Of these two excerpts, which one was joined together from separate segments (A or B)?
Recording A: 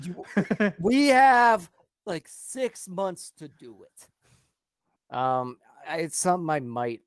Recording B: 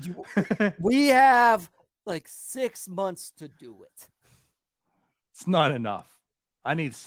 A